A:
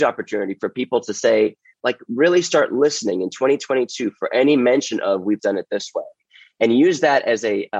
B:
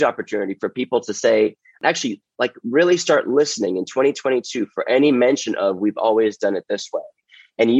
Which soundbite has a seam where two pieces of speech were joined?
A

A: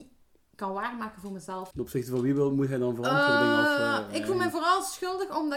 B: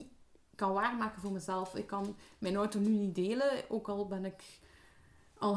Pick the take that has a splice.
A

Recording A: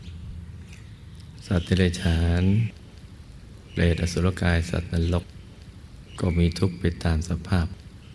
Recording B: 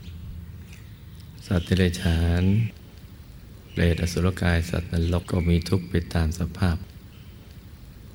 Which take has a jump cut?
B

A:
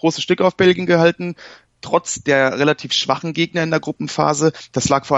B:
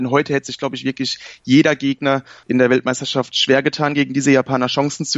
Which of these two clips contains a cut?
B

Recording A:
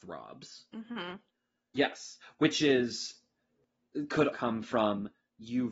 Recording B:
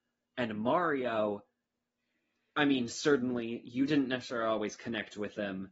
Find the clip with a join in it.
A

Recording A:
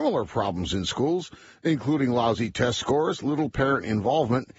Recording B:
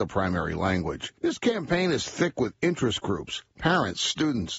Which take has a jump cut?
B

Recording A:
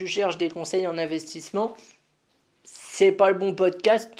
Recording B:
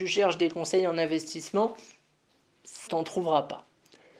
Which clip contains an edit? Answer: B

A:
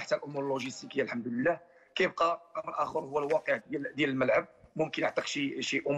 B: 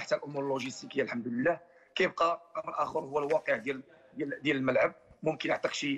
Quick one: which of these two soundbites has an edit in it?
A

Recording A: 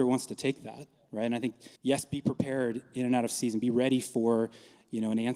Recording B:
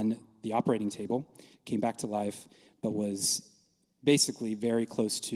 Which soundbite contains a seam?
A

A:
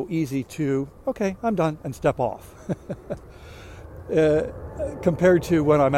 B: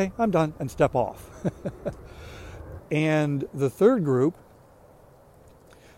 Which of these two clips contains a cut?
B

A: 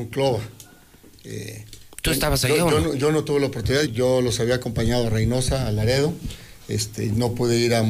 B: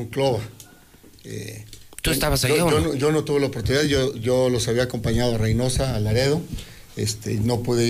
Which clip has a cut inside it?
A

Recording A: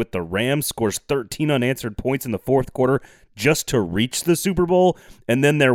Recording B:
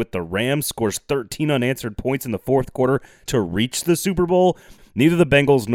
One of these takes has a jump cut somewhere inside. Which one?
B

